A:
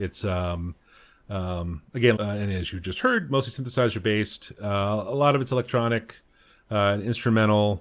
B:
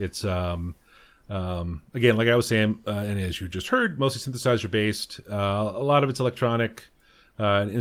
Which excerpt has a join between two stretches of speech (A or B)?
A